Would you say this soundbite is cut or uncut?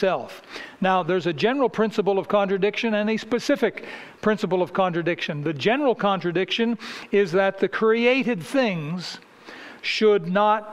uncut